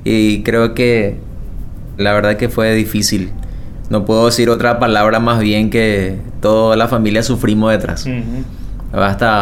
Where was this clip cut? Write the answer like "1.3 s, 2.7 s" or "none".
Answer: 2.0 s